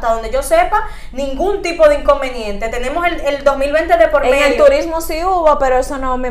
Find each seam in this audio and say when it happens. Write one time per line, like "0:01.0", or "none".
none